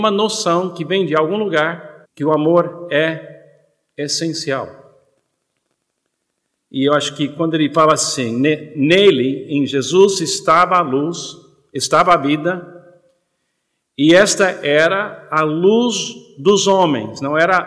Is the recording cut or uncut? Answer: cut